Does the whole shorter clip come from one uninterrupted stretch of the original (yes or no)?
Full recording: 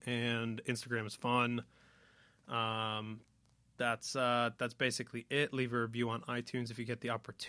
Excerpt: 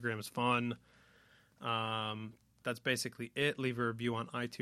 no